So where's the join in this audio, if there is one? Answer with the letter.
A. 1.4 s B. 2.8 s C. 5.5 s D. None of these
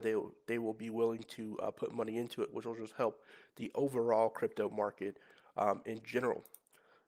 D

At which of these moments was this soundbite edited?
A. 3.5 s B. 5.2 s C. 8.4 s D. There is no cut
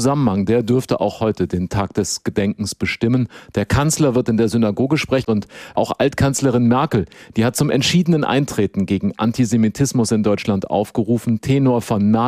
B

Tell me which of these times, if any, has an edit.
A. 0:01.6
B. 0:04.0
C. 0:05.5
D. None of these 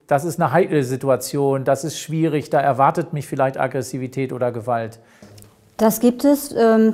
D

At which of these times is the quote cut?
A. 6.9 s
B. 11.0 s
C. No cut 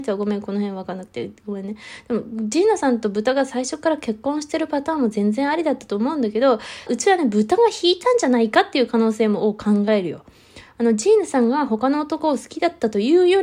A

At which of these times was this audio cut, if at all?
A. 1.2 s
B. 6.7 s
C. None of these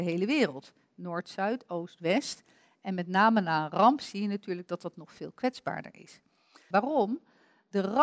B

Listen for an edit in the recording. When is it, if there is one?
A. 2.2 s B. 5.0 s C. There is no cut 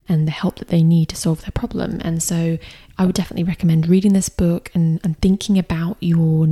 C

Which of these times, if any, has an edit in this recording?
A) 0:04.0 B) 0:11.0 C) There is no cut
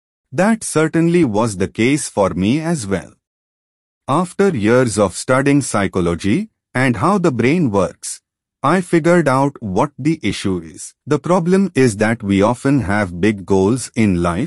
B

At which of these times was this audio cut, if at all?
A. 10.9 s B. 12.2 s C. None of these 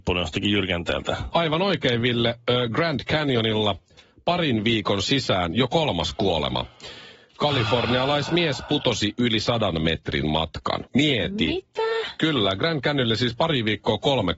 A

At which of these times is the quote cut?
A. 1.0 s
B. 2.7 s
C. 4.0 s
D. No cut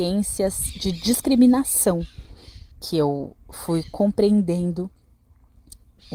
B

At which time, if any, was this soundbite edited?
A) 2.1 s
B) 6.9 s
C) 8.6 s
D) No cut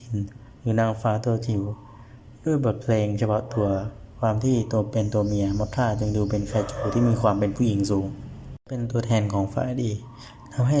C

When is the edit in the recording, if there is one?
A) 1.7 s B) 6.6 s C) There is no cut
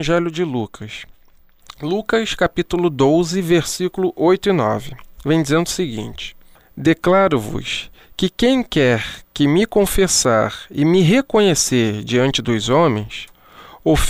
B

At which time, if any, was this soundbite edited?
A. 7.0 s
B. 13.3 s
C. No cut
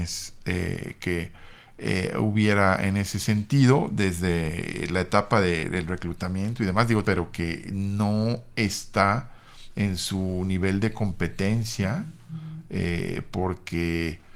A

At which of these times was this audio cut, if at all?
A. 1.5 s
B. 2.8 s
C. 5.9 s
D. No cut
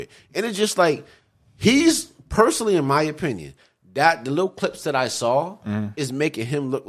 D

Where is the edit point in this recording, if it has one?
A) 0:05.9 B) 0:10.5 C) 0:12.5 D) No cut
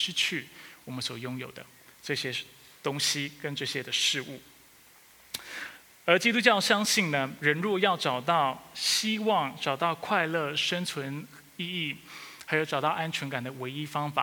D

